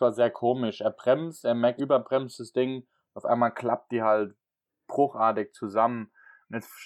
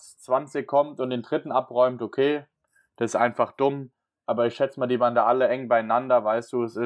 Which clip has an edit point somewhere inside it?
first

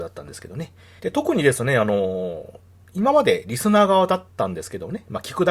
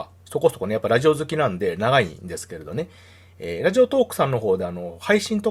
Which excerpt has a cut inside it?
first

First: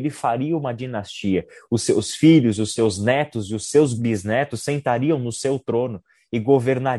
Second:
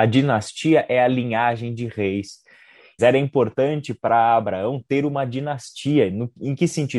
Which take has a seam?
second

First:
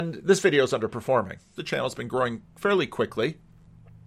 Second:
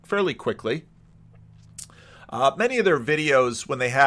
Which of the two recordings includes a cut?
first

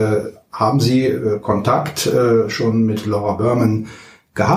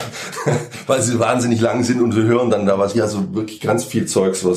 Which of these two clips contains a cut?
second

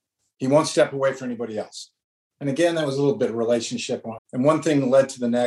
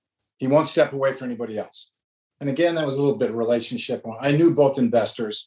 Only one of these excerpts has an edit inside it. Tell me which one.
first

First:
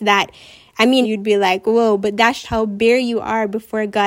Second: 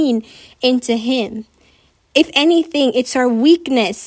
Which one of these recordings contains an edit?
first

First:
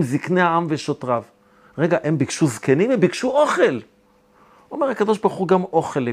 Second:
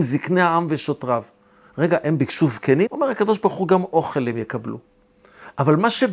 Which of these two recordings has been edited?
second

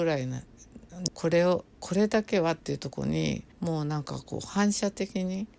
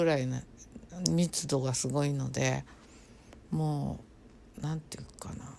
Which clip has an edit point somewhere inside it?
first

